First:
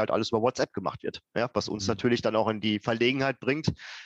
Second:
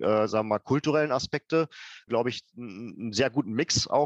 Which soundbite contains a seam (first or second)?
second